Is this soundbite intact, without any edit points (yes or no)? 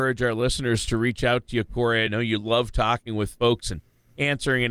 yes